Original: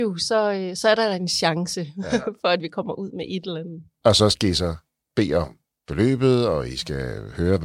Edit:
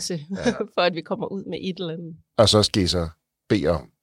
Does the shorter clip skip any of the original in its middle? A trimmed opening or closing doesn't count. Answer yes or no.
no